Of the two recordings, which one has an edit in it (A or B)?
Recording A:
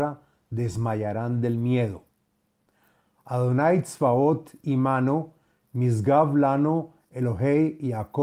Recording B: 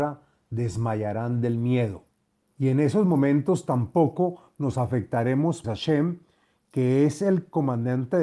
B